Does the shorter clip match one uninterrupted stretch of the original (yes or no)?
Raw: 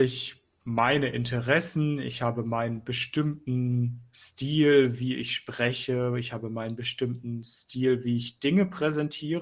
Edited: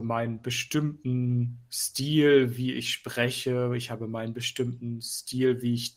yes